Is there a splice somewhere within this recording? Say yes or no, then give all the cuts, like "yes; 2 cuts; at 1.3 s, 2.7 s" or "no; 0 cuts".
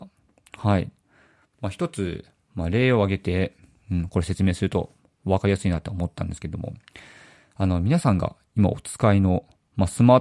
yes; 1 cut; at 1.5 s